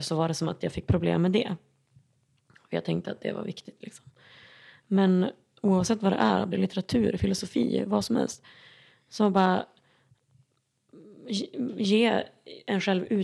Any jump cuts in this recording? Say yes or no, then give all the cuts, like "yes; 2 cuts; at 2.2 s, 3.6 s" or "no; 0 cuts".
yes; 1 cut; at 6.5 s